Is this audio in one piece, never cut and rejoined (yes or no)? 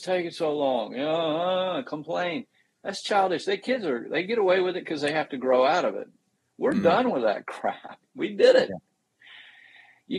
yes